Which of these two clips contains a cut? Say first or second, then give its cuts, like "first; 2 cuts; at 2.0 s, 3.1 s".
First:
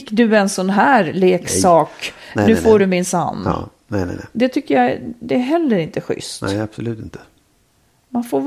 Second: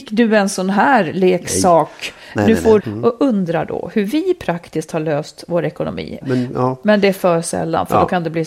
second; 2 cuts; at 2.8 s, 6.2 s